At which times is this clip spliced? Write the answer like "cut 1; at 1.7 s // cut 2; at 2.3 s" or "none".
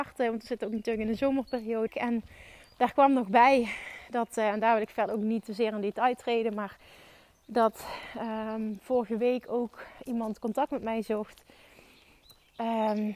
cut 1; at 1.9 s